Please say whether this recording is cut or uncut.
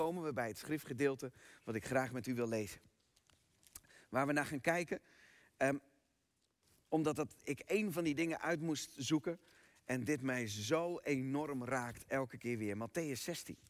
uncut